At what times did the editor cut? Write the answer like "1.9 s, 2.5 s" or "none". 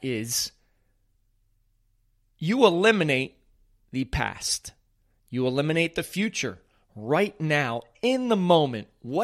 none